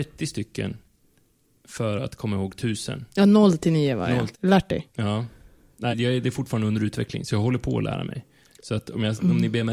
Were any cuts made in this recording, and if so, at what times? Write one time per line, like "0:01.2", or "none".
0:04.3
0:05.9